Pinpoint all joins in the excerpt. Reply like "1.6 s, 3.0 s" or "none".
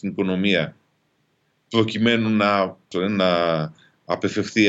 2.9 s